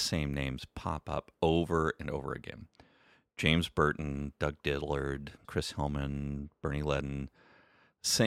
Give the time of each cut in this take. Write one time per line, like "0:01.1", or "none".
0:05.4